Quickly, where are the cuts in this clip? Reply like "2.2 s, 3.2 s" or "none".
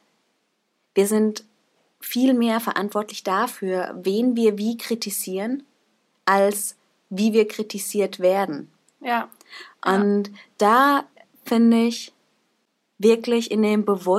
none